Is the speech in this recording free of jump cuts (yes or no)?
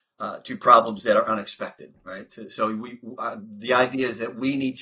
yes